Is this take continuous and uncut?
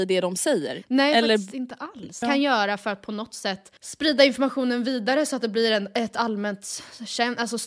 no; 2 cuts; at 2.2 s, 3.8 s

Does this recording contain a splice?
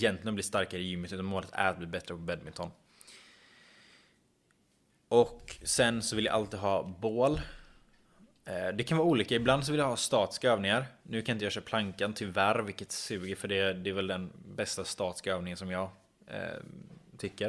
no; 0 cuts

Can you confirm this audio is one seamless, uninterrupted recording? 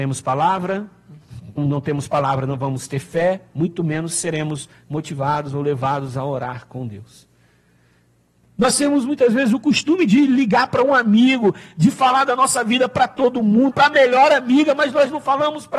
no; 3 cuts; at 1.6 s, 8.4 s, 13.7 s

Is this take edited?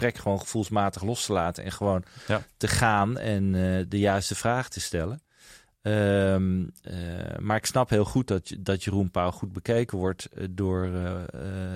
no; 0 cuts

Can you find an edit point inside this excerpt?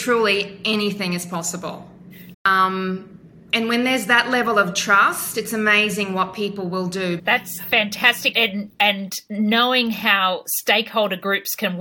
yes; 3 cuts; at 2.3 s, 7.2 s, 8.3 s

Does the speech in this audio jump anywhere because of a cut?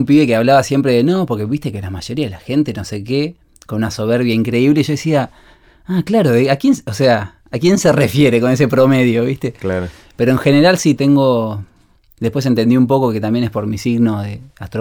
yes; 1 cut; at 11.0 s

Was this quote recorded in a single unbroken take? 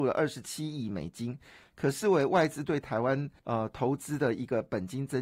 no; 1 cut; at 3.4 s

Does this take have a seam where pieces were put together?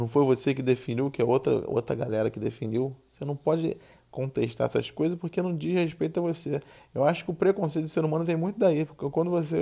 no; 0 cuts

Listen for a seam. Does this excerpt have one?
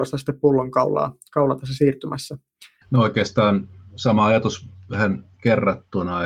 yes; 1 cut; at 2.8 s

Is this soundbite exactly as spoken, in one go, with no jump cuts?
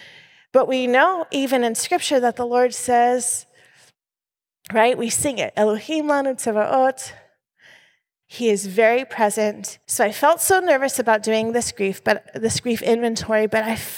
no; 2 cuts; at 8.2 s, 9.8 s

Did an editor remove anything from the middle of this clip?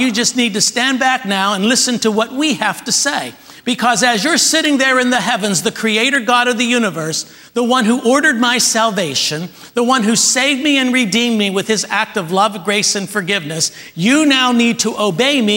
no; 0 cuts

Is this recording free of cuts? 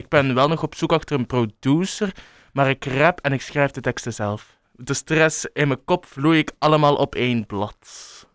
no; 1 cut; at 4.6 s

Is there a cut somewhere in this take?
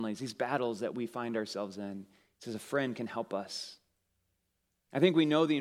no; 0 cuts

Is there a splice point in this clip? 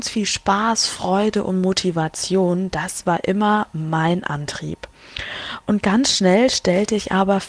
no; 0 cuts

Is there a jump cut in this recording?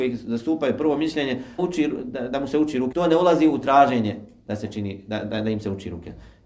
yes; 2 cuts; at 1.6 s, 2.9 s

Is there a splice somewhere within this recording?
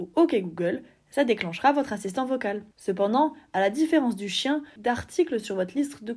yes; 2 cuts; at 2.7 s, 4.8 s

